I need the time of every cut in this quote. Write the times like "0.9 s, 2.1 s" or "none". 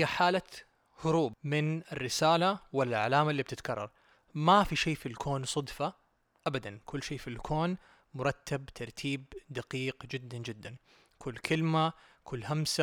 none

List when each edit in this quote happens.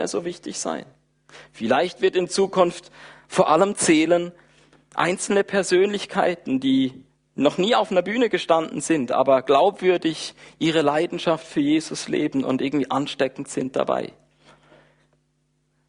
none

